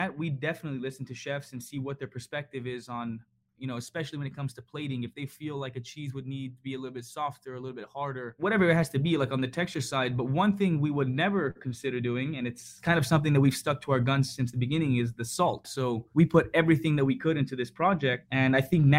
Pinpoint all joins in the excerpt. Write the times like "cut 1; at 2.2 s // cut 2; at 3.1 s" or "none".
cut 1; at 15.6 s